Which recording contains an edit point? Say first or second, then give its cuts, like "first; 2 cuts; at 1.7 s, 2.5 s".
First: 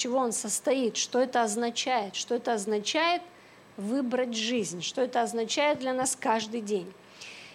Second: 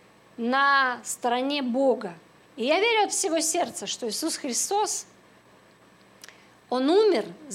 second; 1 cut; at 2.4 s